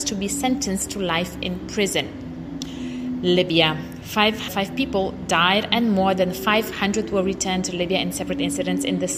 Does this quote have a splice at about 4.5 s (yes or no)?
yes